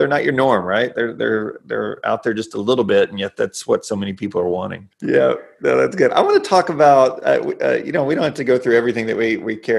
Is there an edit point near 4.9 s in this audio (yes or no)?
yes